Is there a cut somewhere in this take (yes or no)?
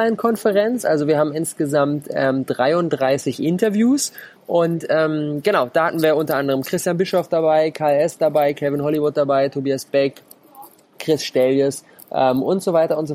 yes